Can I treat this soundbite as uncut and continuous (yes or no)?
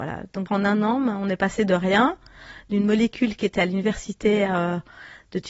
yes